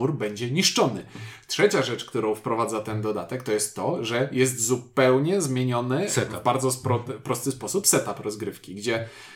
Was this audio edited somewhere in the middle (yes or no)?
no